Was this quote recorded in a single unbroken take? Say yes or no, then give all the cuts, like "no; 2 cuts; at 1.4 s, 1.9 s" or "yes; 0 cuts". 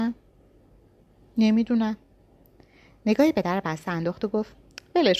yes; 0 cuts